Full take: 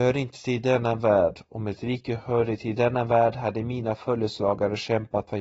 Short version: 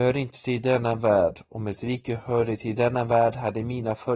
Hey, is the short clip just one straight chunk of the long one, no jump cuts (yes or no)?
yes